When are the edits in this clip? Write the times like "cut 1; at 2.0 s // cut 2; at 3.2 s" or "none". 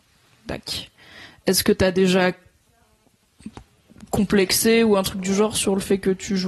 none